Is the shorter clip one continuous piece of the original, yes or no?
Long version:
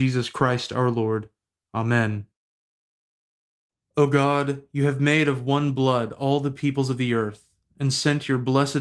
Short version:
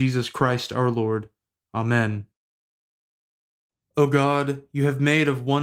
yes